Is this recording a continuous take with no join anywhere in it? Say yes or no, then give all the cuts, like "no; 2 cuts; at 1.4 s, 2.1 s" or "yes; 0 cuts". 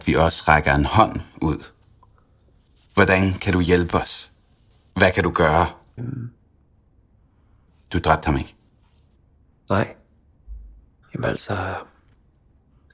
no; 2 cuts; at 6.0 s, 11.0 s